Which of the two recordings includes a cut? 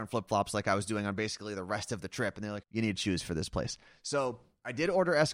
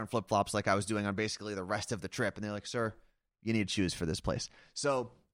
first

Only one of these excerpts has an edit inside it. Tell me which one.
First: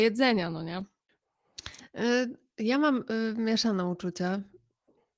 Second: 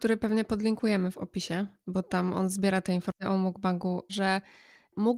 second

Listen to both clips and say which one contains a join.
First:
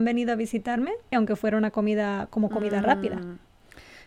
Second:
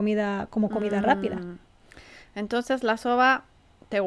first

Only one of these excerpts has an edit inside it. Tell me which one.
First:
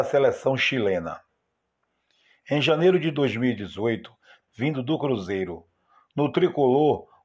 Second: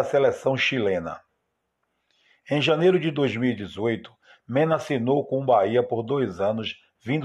first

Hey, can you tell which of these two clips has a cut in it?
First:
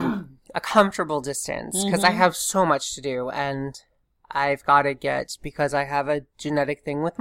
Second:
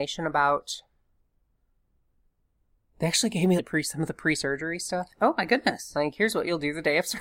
second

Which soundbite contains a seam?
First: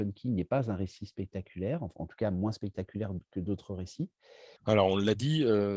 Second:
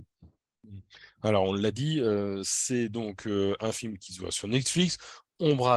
first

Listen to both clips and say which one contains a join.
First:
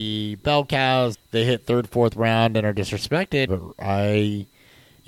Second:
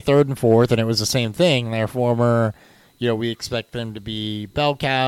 first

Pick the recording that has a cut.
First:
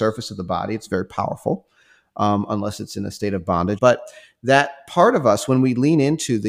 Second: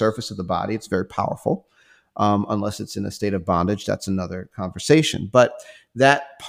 first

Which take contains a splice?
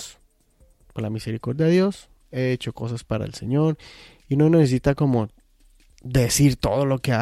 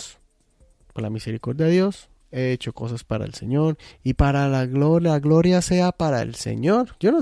second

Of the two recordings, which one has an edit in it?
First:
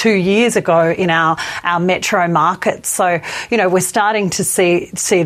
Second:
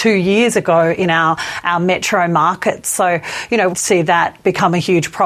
second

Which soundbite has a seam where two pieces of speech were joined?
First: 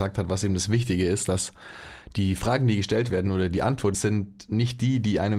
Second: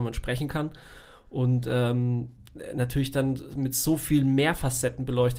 first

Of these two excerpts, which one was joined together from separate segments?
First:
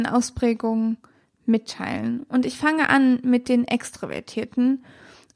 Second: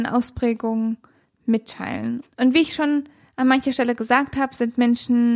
second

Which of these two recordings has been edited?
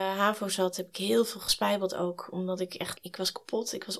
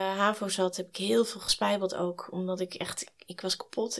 first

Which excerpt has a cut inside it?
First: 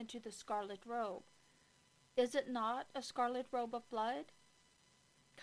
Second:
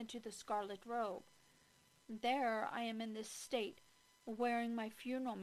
second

